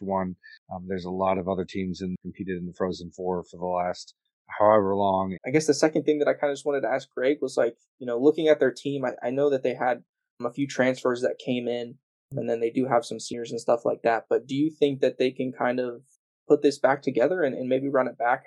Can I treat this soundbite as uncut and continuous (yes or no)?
no